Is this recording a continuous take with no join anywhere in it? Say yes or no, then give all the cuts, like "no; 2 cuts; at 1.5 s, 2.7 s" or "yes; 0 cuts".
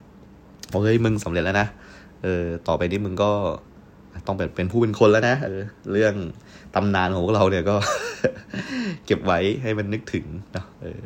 no; 1 cut; at 5.5 s